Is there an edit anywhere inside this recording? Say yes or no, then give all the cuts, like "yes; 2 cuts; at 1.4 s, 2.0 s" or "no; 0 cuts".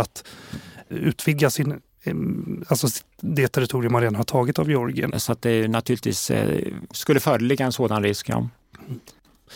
yes; 2 cuts; at 5.1 s, 6.9 s